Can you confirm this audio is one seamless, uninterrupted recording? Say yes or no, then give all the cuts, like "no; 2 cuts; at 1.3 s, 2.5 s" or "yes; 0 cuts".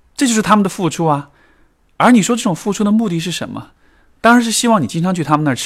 yes; 0 cuts